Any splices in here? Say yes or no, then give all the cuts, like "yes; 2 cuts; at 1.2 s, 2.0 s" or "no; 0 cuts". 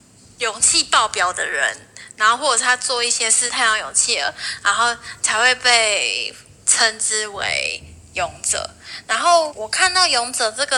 yes; 2 cuts; at 3.5 s, 9.5 s